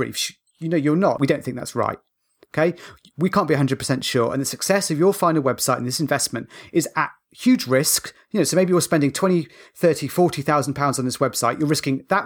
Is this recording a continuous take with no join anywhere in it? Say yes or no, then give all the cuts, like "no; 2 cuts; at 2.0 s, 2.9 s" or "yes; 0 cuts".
no; 1 cut; at 1.2 s